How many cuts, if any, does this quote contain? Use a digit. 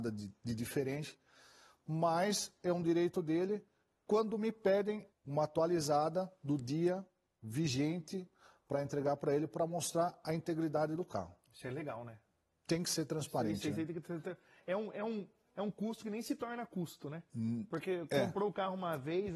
1